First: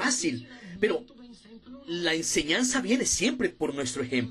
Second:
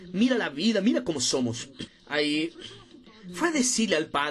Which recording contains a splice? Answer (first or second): second